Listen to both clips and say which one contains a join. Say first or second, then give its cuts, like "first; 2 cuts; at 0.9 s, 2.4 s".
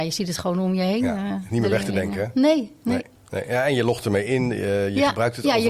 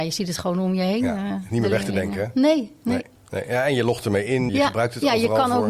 second; 1 cut; at 4.5 s